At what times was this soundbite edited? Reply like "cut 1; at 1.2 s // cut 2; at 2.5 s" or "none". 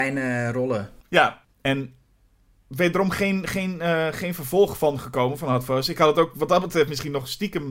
none